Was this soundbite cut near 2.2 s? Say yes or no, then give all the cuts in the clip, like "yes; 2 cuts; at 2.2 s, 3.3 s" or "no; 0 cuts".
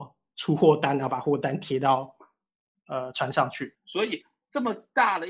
no; 1 cut; at 3.7 s